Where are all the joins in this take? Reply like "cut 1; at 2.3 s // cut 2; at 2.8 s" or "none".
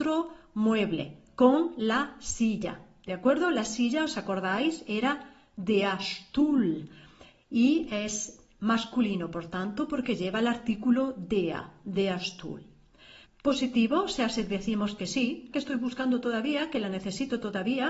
cut 1; at 13.2 s // cut 2; at 15.5 s